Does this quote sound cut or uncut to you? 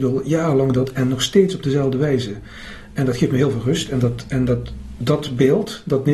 uncut